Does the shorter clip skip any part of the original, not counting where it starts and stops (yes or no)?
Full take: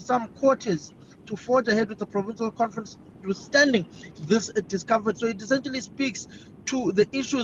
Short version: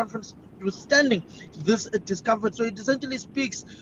no